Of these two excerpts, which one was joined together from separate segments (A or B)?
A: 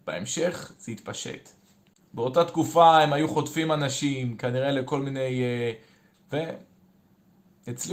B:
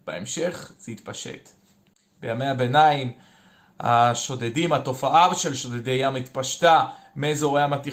A